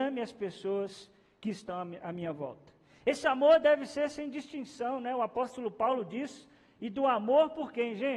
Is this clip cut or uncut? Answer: uncut